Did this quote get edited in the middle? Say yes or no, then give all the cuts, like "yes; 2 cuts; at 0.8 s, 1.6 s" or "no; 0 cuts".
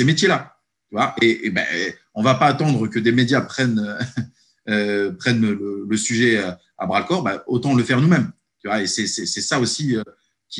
no; 0 cuts